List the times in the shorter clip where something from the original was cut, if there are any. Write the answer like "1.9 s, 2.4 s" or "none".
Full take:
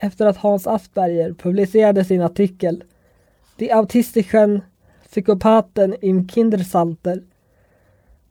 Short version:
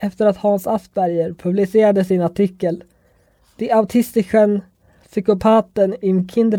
none

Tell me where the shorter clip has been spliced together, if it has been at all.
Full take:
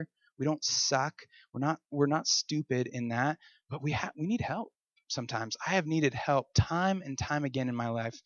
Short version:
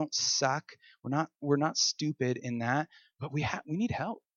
none

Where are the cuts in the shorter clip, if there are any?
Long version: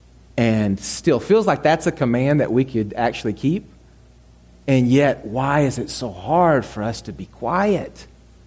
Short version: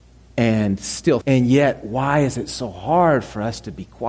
1.2 s

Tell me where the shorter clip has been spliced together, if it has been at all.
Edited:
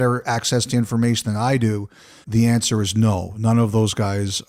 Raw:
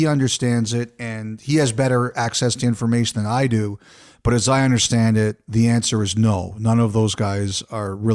2.2 s

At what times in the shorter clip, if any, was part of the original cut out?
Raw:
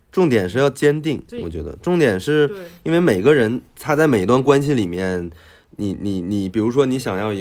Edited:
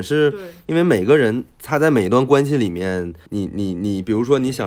3.3 s

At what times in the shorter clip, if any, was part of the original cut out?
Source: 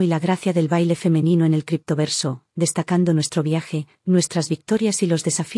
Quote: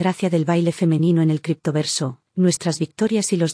2.3 s

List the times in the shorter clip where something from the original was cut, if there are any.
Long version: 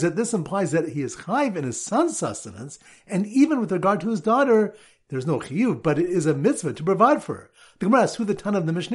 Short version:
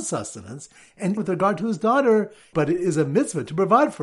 1.2 s, 2.5 s

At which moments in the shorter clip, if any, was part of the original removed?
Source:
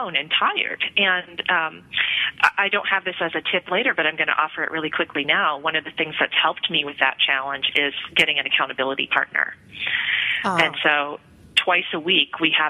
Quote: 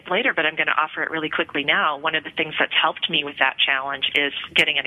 none

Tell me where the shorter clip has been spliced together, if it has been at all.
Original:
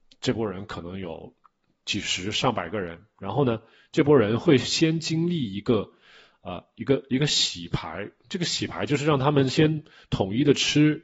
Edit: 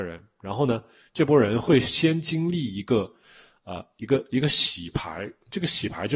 none

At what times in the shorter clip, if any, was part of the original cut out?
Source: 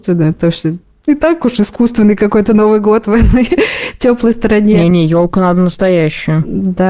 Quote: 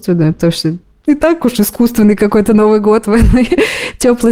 none

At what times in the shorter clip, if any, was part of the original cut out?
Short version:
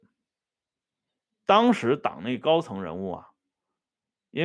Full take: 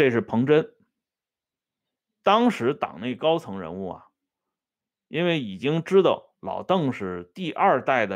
none

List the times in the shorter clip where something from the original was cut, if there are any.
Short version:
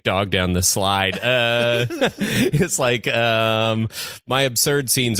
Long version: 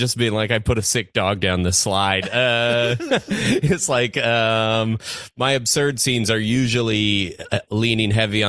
none

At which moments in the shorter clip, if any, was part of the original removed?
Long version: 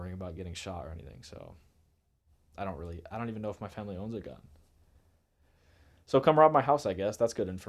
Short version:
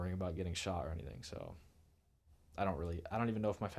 none

